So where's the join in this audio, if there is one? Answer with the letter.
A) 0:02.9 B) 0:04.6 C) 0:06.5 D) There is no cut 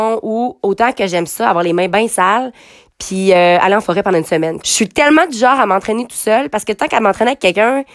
B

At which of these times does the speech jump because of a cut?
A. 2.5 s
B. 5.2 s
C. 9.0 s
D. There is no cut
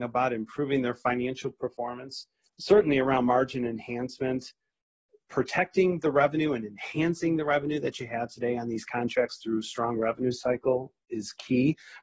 A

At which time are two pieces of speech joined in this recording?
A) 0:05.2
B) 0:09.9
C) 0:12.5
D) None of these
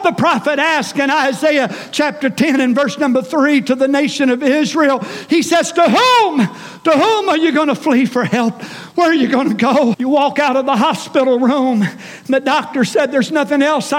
B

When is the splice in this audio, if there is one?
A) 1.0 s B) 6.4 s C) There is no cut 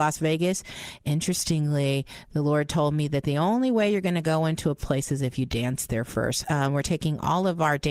B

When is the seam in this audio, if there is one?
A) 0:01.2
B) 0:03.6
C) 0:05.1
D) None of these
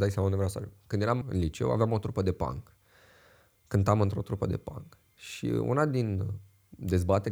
A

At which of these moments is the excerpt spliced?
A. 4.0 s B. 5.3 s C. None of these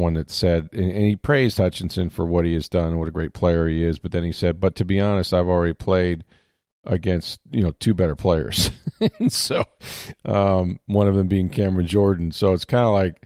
C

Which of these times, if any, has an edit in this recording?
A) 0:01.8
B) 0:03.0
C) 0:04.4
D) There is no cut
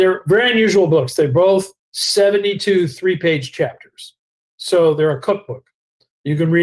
A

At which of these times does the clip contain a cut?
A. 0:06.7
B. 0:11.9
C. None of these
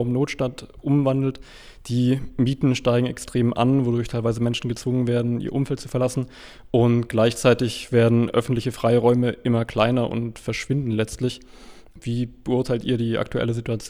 C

